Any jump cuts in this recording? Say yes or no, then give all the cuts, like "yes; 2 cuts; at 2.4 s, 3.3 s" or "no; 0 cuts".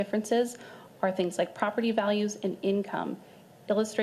no; 0 cuts